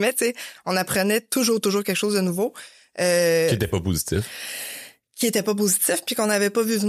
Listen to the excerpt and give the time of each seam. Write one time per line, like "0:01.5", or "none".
none